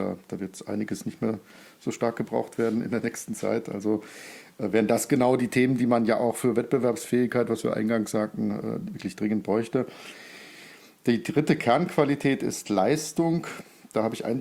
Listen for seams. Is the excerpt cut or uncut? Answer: uncut